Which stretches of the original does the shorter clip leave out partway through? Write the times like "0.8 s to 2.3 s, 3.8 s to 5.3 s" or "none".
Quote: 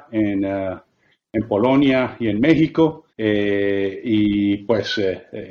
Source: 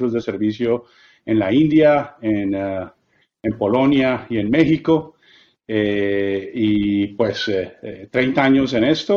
5.2 s to 5.6 s